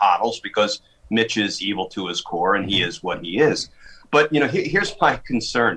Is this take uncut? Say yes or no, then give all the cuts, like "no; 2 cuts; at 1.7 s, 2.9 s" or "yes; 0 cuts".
yes; 0 cuts